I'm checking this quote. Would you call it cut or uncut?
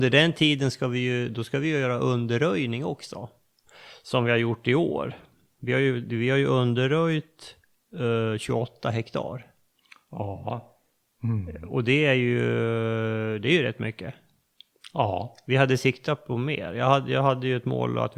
uncut